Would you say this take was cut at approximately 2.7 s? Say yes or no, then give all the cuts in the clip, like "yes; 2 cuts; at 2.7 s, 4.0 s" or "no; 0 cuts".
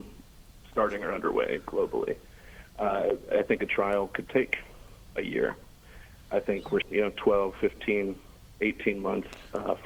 no; 1 cut; at 6.8 s